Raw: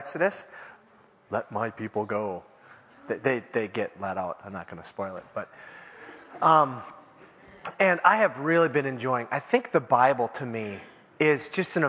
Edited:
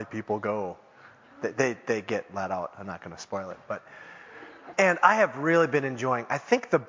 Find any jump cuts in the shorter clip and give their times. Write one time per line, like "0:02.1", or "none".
0:04.7